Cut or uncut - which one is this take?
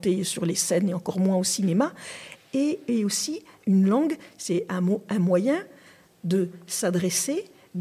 uncut